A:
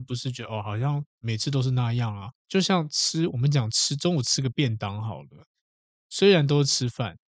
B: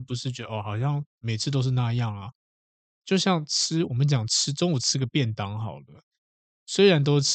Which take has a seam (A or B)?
A